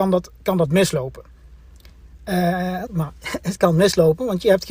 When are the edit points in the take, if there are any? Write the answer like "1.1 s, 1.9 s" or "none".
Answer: 2.9 s